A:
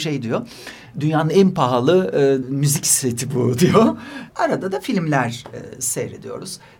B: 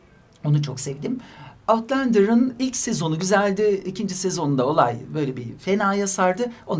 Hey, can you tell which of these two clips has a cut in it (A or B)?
A